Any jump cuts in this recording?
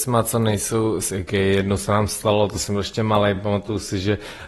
no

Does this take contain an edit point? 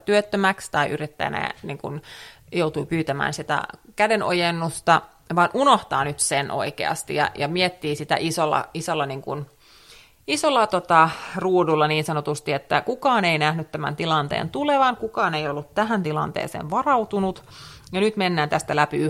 no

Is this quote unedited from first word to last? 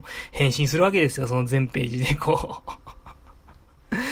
yes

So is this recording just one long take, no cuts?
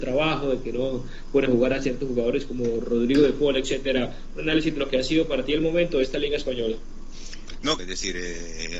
no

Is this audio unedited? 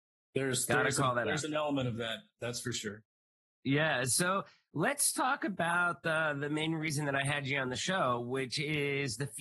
yes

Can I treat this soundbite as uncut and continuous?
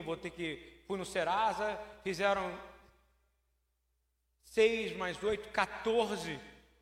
yes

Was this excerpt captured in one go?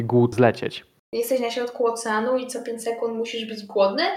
no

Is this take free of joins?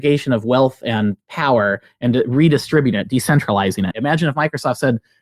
no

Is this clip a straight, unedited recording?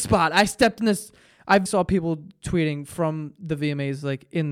no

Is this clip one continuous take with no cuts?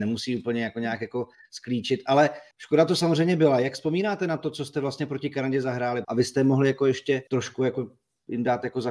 no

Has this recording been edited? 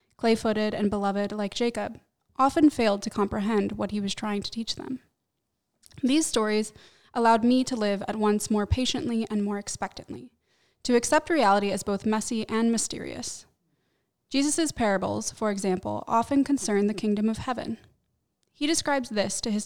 no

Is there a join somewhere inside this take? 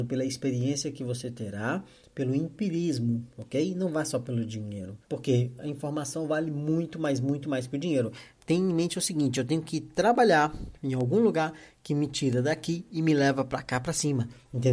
yes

